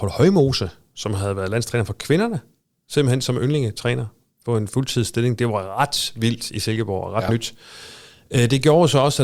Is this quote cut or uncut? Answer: uncut